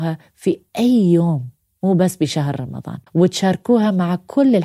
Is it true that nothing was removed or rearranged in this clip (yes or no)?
no